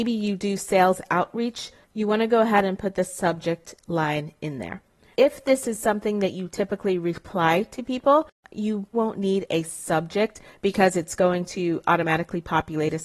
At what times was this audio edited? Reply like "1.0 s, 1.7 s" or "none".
5.1 s, 8.9 s